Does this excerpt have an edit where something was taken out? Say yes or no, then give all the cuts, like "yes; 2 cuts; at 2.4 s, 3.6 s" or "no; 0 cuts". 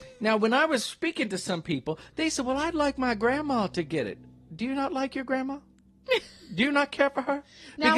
no; 0 cuts